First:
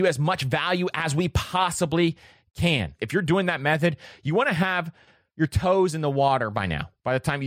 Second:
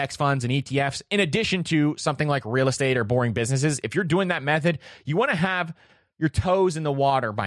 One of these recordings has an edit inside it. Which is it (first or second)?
first